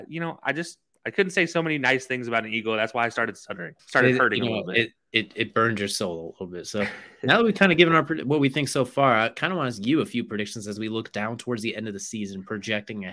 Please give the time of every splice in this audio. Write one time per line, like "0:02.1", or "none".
0:03.8